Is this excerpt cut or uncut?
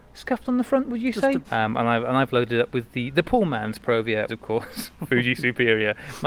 cut